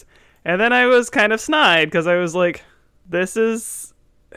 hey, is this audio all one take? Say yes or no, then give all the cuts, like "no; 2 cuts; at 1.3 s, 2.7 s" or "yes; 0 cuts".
yes; 0 cuts